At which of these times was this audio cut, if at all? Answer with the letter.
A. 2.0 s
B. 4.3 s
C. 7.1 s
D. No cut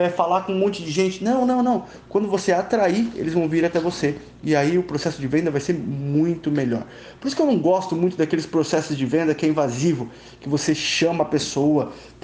A